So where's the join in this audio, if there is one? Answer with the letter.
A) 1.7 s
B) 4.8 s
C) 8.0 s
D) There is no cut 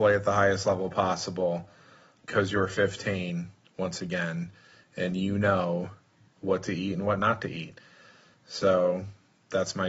D